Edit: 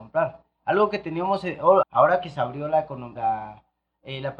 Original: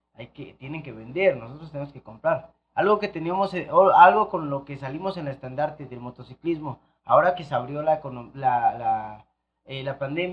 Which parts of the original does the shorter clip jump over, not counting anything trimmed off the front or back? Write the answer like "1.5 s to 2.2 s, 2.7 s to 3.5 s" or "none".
3.9 s to 7.0 s, 8.3 s to 8.8 s